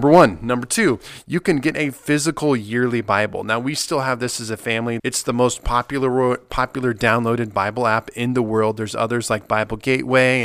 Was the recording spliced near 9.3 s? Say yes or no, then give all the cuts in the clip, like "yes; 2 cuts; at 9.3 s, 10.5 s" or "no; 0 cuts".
no; 1 cut; at 5.0 s